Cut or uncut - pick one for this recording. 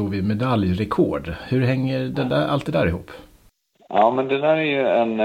uncut